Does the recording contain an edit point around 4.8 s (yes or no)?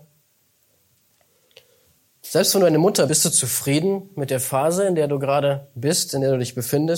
no